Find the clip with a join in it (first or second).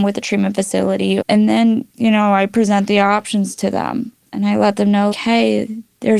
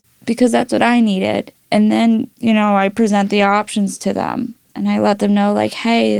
first